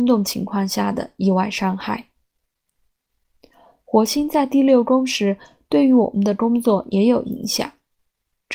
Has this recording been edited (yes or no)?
no